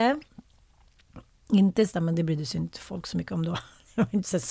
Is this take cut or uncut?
cut